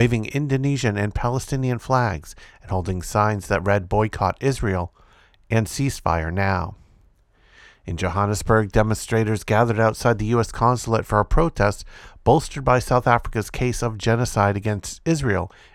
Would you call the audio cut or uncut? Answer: uncut